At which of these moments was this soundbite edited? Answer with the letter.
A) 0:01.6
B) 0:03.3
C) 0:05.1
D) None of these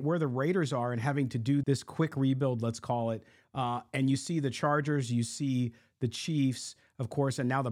A